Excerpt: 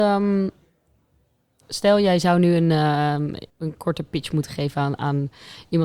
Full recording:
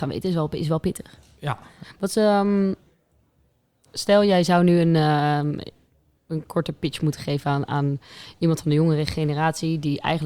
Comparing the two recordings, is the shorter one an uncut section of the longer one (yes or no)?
no